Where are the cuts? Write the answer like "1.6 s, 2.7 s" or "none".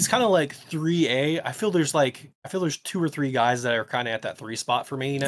2.3 s